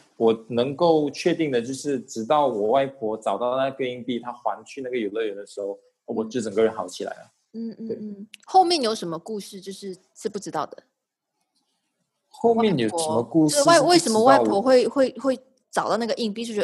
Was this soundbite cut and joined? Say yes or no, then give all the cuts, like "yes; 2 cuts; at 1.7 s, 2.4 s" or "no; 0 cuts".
no; 0 cuts